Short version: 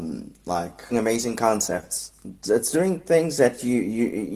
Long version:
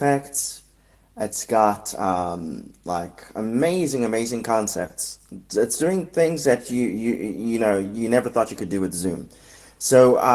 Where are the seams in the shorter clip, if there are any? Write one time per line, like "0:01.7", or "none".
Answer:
0:00.9